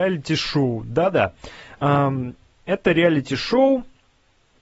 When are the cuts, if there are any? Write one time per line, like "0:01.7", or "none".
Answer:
none